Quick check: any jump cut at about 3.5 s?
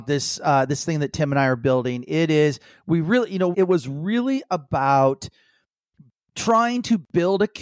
yes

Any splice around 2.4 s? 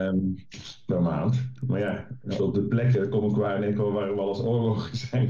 yes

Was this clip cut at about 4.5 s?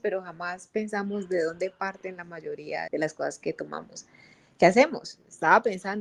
no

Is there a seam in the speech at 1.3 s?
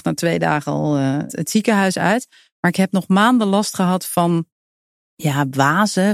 yes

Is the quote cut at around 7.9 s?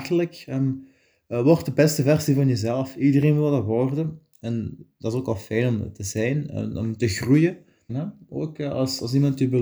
yes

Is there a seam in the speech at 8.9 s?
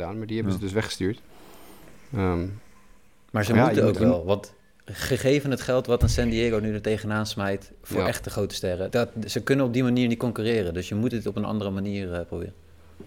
yes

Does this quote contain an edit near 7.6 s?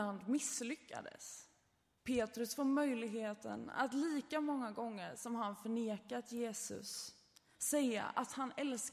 no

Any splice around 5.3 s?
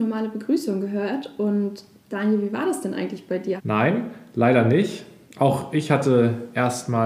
no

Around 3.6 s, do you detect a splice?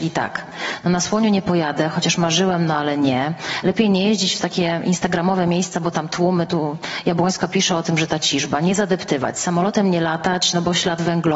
no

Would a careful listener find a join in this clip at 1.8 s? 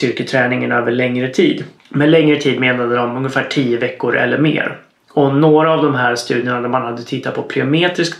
yes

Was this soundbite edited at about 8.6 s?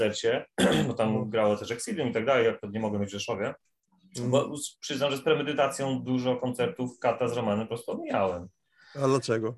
no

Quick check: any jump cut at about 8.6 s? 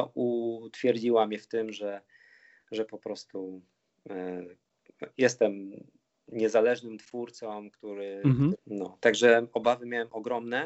yes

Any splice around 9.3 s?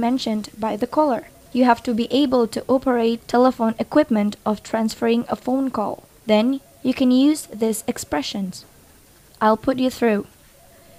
yes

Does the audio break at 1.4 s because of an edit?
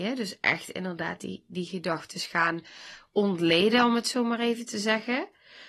no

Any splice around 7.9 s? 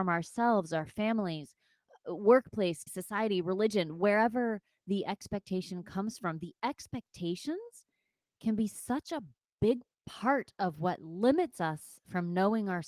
no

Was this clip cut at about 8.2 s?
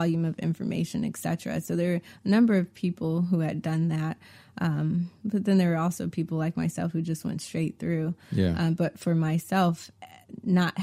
no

